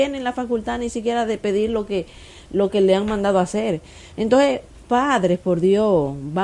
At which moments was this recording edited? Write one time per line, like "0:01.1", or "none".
none